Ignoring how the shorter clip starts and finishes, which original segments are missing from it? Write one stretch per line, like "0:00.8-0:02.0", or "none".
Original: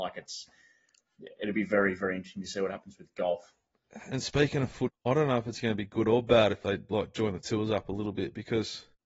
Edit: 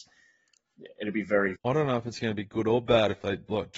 0:02.0-0:05.0